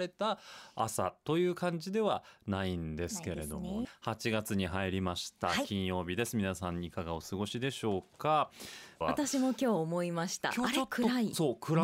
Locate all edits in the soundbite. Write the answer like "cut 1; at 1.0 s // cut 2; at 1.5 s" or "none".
cut 1; at 3.8 s // cut 2; at 9.0 s

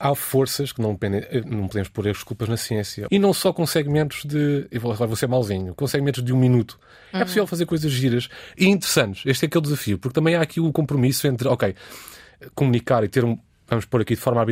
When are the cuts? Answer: cut 1; at 3.1 s

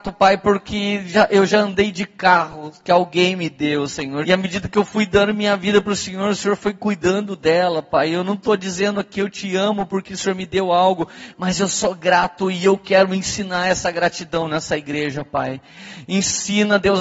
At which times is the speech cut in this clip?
cut 1; at 4.2 s

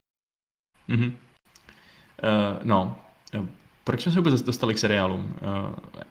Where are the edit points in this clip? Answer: none

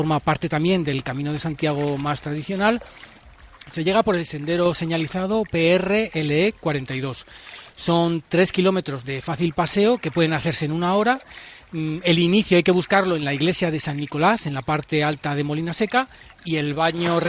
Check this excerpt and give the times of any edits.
none

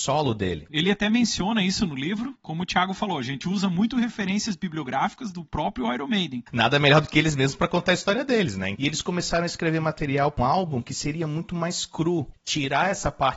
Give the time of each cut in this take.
cut 1; at 8.7 s // cut 2; at 10.4 s

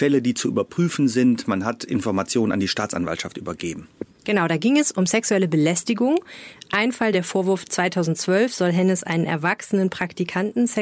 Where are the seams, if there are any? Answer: cut 1; at 7.1 s

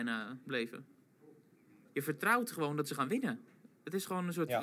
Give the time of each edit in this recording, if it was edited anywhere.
cut 1; at 1.9 s

